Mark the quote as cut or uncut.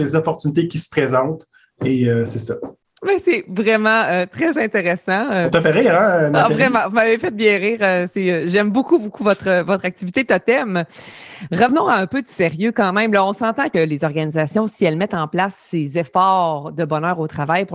uncut